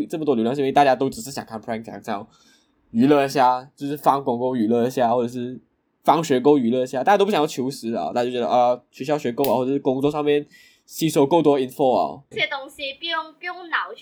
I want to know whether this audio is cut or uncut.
cut